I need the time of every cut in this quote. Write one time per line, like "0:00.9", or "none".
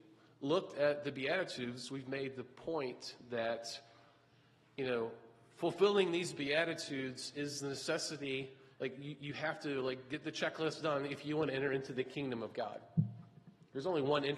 none